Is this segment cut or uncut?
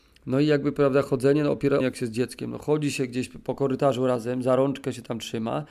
cut